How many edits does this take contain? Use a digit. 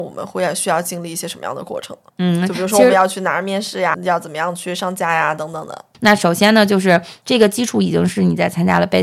1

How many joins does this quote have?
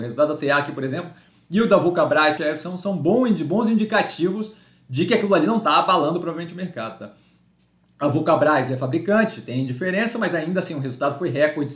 1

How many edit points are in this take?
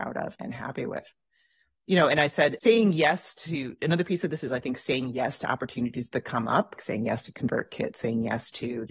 2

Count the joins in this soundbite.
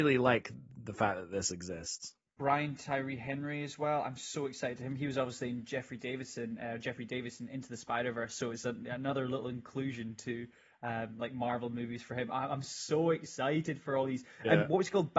0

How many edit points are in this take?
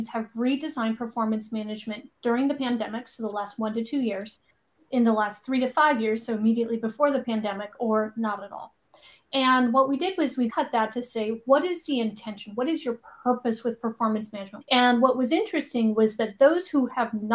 2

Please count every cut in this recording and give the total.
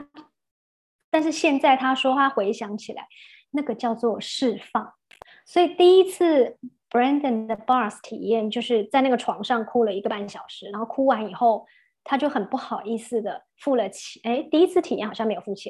0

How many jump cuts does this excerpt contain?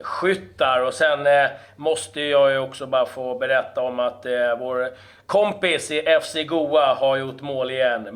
0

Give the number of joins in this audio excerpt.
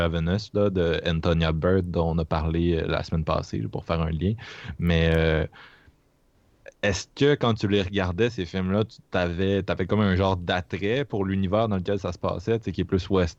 0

